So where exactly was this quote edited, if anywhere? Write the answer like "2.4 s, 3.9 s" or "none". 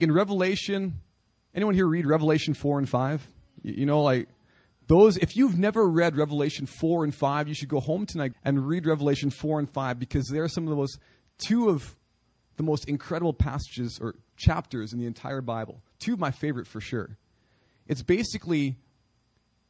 8.3 s